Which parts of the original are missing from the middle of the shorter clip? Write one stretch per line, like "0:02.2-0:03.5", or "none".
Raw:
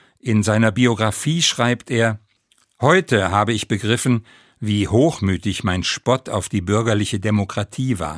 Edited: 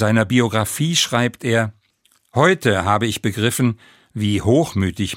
none